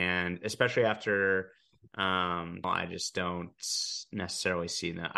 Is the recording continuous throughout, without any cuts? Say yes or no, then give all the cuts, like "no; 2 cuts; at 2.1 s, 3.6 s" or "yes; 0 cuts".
no; 1 cut; at 2.6 s